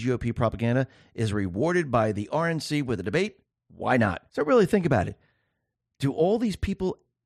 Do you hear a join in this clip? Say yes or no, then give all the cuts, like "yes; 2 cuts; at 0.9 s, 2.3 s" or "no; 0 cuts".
no; 0 cuts